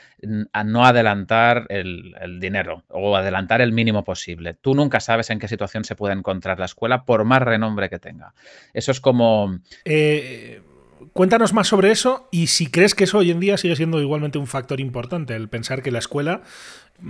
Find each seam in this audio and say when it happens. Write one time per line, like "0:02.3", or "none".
0:09.8

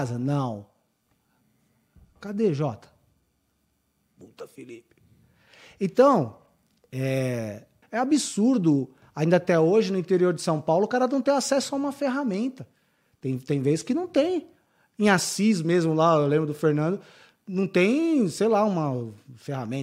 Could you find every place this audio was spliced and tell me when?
0:07.8

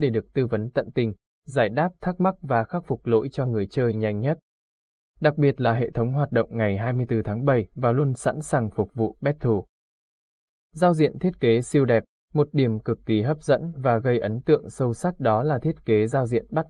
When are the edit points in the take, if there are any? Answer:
none

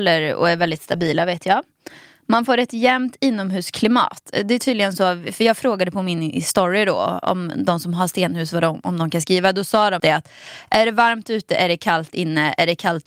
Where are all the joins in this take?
0:10.0

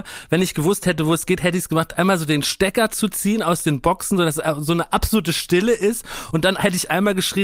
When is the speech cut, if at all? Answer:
none

